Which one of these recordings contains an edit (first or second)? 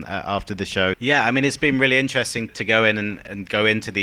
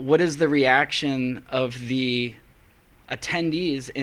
first